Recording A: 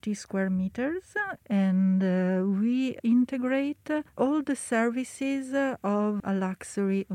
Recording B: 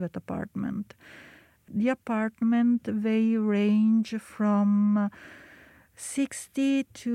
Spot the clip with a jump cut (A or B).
A